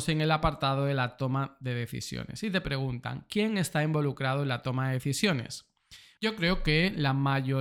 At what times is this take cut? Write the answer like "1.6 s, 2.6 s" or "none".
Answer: 6.2 s